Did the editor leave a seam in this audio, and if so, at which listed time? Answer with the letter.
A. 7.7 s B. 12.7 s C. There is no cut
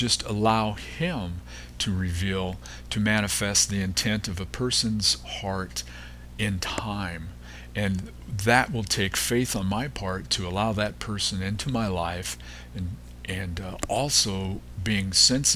C